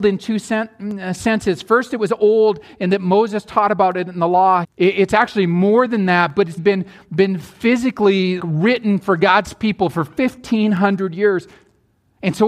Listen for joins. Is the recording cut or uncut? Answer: cut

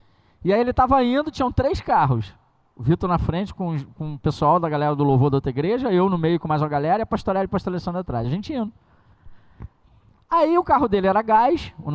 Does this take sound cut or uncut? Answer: uncut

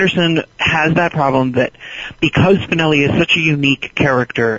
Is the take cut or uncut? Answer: uncut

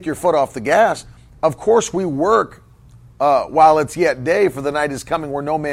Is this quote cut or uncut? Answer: uncut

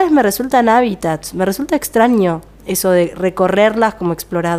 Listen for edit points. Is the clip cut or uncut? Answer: uncut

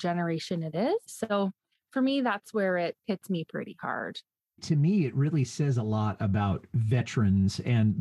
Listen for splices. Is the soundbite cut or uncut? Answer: cut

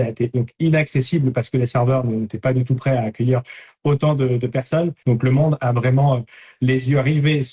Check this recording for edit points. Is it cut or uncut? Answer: cut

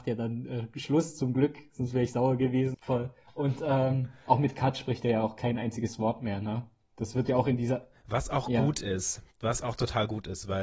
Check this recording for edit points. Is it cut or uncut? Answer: cut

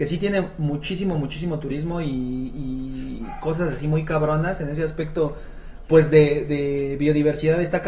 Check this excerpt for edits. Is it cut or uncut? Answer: uncut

